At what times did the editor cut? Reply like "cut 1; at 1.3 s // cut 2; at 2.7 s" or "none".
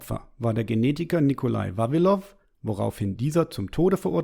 cut 1; at 2.4 s